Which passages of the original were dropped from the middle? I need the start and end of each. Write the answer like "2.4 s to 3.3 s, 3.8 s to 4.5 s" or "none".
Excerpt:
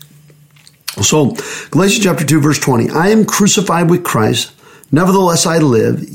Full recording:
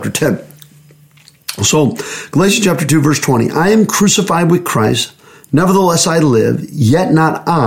none